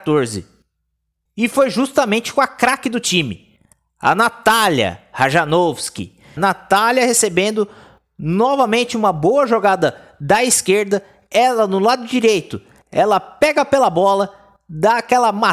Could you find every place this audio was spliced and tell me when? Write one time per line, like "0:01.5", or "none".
0:01.3
0:06.4